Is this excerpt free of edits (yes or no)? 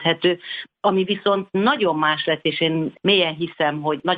yes